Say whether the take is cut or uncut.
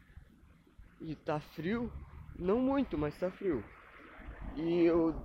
uncut